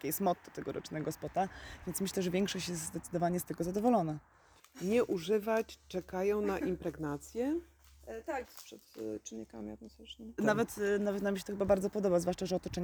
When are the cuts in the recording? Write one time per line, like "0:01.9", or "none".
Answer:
0:08.4
0:10.4